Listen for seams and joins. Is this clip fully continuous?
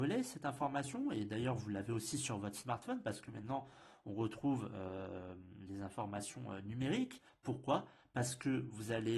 no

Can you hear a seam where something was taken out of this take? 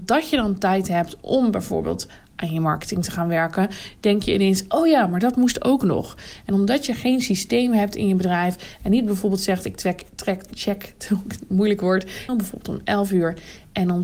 yes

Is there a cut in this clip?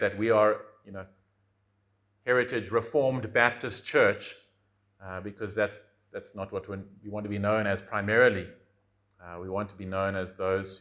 no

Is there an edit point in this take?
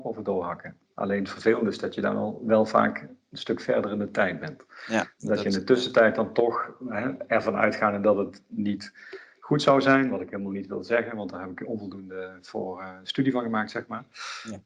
no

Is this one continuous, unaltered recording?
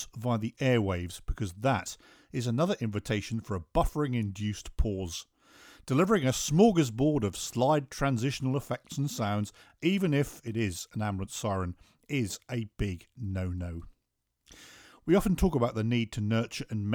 yes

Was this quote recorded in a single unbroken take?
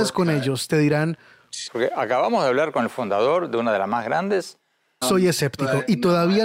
no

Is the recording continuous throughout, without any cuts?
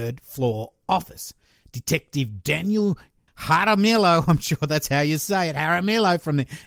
no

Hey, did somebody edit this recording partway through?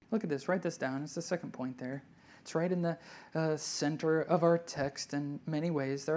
no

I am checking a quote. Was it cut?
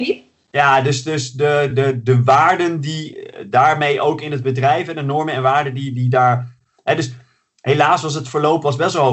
no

